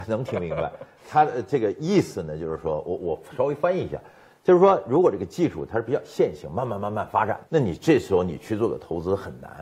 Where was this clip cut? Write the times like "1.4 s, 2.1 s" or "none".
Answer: none